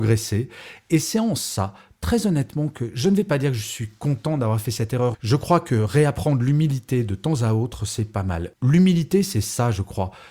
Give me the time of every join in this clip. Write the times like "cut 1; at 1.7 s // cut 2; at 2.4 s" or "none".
cut 1; at 5.1 s // cut 2; at 8.5 s